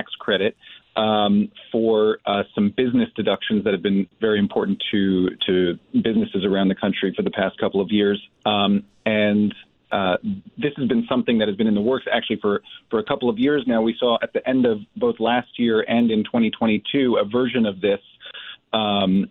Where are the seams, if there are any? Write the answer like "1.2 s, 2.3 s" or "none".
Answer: none